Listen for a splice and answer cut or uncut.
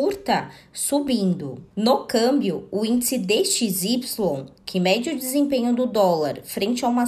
uncut